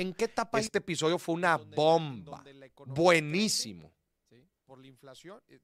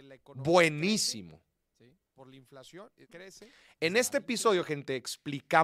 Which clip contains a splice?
second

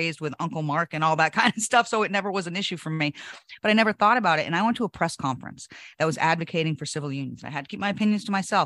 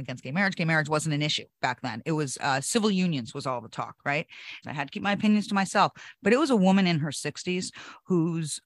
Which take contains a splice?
second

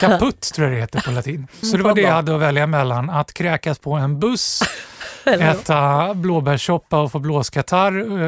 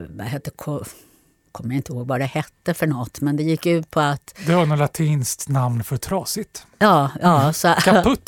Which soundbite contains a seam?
first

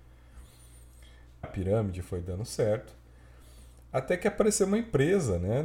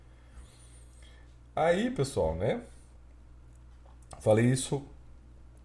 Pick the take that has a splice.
first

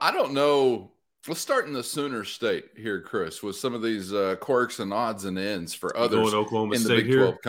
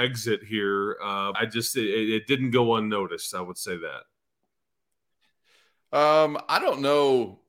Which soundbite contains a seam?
second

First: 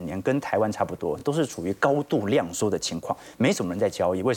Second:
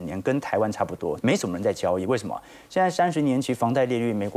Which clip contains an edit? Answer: second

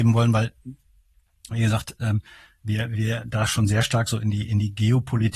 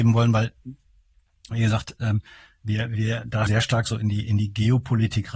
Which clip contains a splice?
second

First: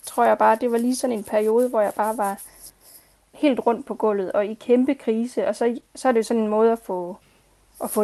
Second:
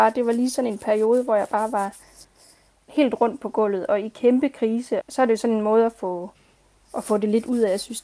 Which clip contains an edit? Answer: second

